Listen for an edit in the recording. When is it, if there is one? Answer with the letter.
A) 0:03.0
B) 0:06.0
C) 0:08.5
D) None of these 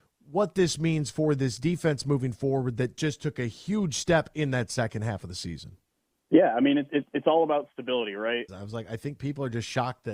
C